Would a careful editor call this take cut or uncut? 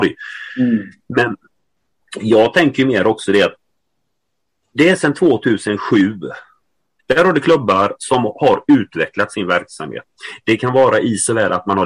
cut